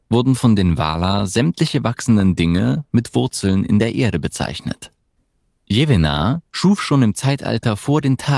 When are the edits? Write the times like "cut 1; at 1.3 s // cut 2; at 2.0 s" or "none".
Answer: cut 1; at 6.5 s